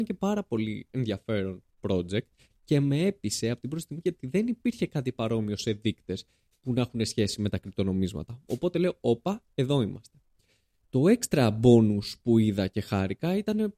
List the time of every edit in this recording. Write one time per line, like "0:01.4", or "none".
none